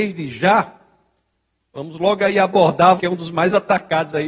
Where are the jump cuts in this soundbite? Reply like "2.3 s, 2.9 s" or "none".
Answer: 3.0 s